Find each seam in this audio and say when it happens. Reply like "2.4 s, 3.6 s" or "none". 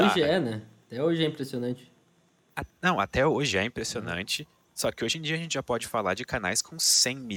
none